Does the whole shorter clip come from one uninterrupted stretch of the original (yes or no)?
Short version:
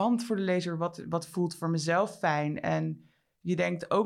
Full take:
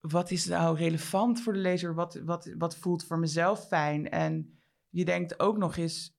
no